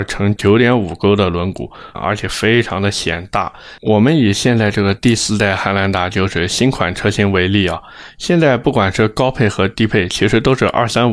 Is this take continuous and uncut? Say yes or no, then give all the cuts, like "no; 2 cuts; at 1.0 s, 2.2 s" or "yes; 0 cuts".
no; 2 cuts; at 1.9 s, 3.8 s